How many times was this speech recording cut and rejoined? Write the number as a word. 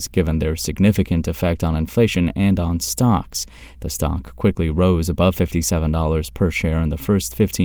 one